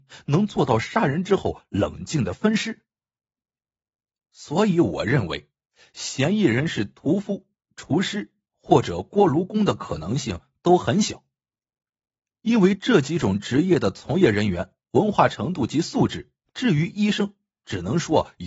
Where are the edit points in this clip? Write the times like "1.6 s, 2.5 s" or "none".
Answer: 16.5 s